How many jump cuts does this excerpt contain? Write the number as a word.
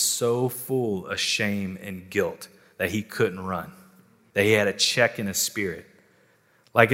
one